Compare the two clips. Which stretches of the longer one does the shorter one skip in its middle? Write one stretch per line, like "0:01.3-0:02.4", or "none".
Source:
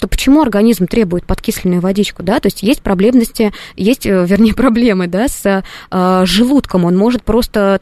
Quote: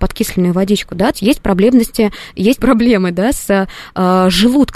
0:02.4-0:02.5
0:04.0-0:04.5